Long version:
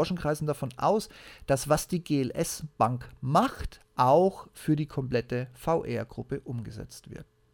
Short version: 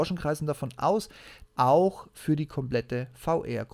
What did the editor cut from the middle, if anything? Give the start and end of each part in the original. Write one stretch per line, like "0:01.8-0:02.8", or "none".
0:01.5-0:03.9